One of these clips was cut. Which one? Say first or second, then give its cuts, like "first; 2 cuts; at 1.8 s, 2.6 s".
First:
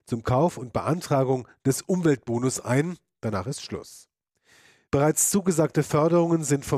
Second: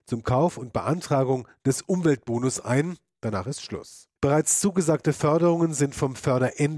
second; 1 cut; at 4.2 s